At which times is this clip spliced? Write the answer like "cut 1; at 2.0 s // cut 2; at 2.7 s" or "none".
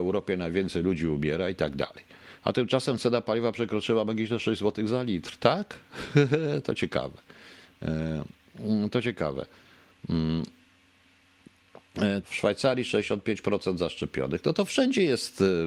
cut 1; at 12.2 s